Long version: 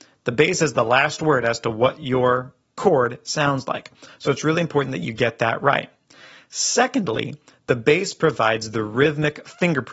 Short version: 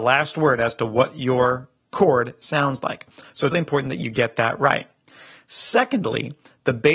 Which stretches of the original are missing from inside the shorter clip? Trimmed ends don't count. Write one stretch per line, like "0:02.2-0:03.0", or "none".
0:04.4-0:04.5